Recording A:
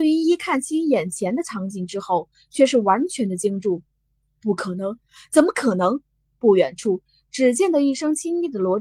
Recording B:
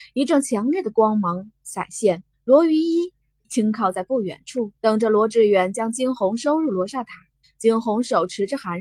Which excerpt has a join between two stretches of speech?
B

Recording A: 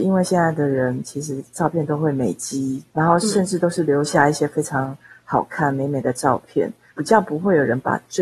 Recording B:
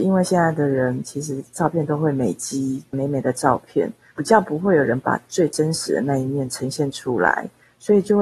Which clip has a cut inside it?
B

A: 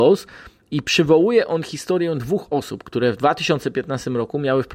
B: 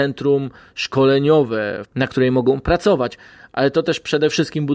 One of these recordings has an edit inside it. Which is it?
B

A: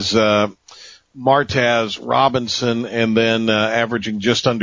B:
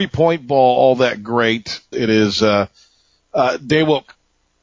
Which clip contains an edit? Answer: B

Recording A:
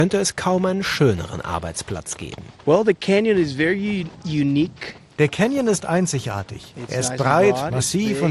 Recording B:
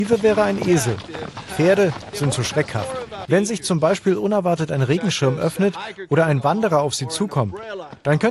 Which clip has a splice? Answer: B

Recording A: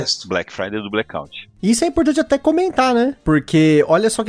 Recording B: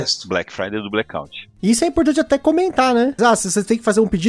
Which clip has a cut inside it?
B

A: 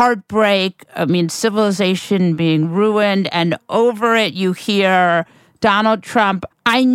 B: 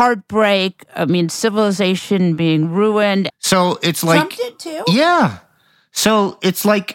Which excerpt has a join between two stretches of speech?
B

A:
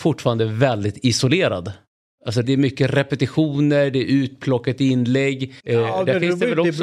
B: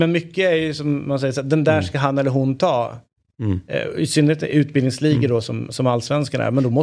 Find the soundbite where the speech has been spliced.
A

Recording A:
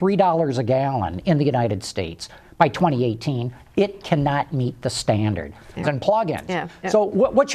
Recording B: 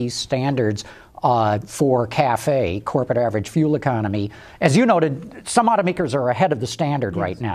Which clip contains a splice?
A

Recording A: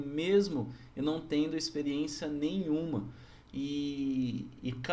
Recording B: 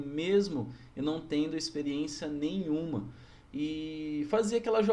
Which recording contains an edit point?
B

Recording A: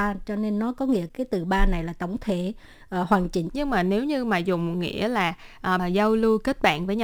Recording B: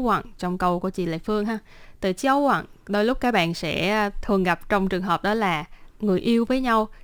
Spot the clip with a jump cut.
A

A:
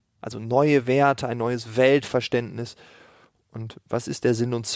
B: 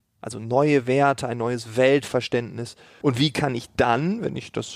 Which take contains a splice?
B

